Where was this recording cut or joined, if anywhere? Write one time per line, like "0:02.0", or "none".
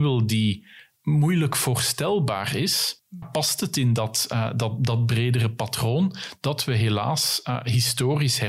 0:03.2